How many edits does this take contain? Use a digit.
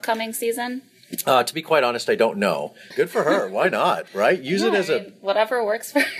1